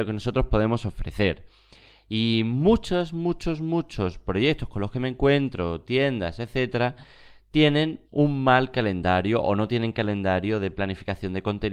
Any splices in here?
yes; 1 cut; at 8.1 s

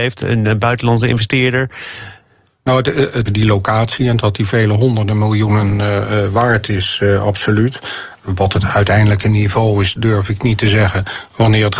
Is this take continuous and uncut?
no; 1 cut; at 3.3 s

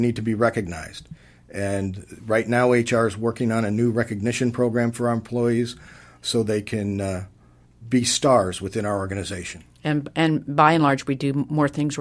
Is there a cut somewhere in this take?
no; 0 cuts

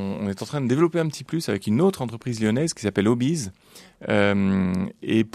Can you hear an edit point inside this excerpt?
no; 0 cuts

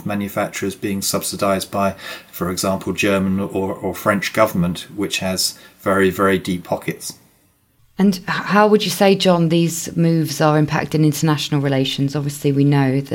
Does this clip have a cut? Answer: no; 0 cuts

